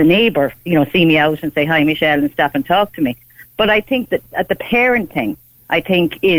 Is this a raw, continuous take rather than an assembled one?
yes; 0 cuts

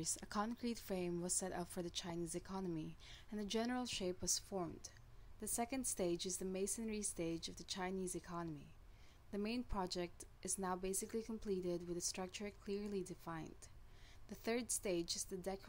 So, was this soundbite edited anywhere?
no; 0 cuts

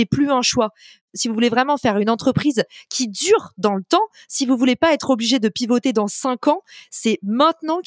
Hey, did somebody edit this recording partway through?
no; 0 cuts

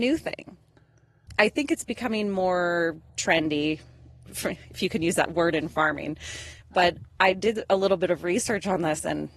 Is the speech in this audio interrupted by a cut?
yes; 1 cut; at 3.1 s

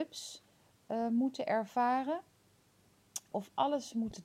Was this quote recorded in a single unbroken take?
no; 1 cut; at 3.3 s

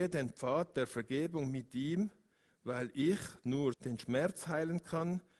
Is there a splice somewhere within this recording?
yes; 1 cut; at 3.7 s

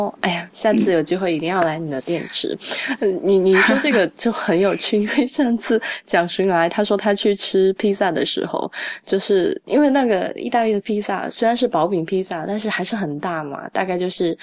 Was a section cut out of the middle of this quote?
no; 0 cuts

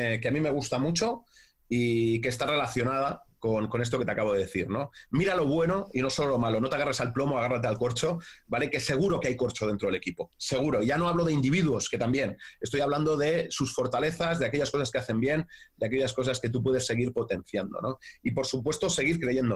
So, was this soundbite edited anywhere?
no; 0 cuts

